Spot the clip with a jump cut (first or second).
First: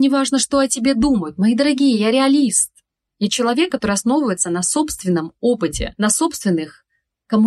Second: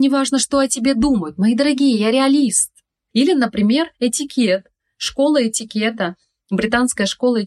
second